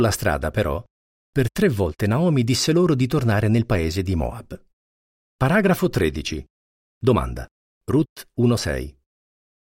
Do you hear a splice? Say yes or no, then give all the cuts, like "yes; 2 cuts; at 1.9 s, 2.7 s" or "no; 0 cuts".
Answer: yes; 2 cuts; at 5.2 s, 7.6 s